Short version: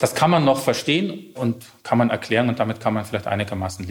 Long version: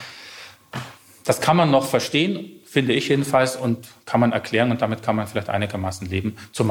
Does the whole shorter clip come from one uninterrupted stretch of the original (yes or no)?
no